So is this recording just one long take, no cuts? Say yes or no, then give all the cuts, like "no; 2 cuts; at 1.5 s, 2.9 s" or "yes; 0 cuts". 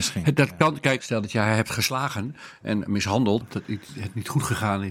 no; 2 cuts; at 1.0 s, 3.4 s